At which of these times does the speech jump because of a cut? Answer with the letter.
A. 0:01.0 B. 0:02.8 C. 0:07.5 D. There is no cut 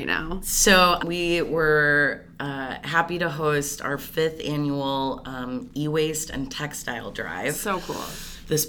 A